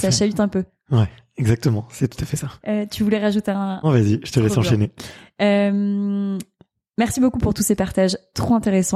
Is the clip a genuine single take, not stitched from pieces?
no; 2 cuts; at 2.6 s, 3.8 s

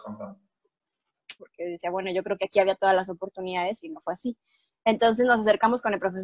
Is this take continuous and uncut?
no; 1 cut; at 1.4 s

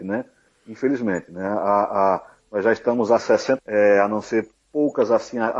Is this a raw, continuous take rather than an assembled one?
no; 1 cut; at 3.6 s

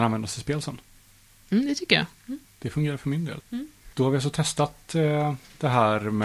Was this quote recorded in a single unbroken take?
no; 2 cuts; at 2.4 s, 3.9 s

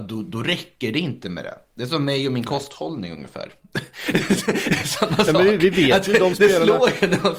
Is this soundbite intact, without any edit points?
yes; 0 cuts

